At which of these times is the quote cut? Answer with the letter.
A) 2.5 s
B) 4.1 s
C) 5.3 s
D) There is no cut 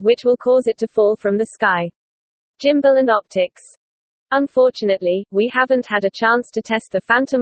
A